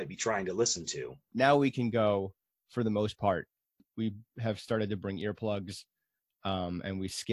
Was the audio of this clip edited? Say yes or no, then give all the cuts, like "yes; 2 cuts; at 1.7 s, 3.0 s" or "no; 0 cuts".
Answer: yes; 1 cut; at 1.3 s